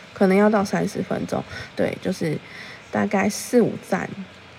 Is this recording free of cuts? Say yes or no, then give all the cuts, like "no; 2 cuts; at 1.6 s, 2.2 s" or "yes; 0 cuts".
no; 1 cut; at 1.7 s